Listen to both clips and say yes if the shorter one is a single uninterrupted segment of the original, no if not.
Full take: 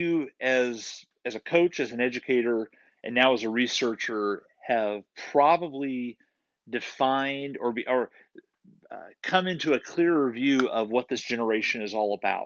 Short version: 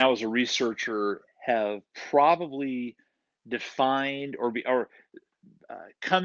yes